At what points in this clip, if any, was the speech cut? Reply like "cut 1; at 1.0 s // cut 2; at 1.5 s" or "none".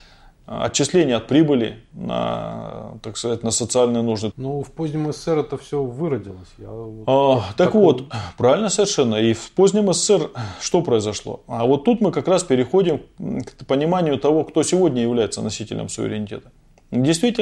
cut 1; at 4.3 s